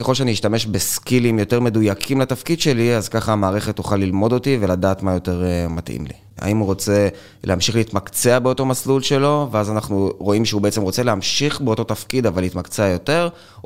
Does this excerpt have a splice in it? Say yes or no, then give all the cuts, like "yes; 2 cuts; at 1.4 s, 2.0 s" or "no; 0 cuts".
yes; 1 cut; at 6.4 s